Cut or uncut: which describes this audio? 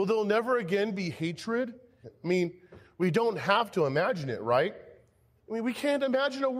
cut